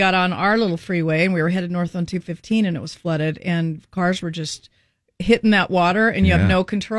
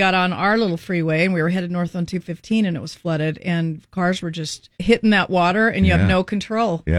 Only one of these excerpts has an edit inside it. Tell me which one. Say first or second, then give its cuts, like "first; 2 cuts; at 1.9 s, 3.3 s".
second; 1 cut; at 4.7 s